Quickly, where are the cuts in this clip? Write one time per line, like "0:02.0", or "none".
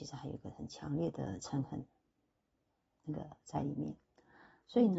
none